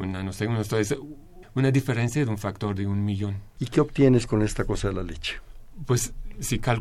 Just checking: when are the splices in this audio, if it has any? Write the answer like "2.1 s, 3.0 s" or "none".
1.4 s, 3.6 s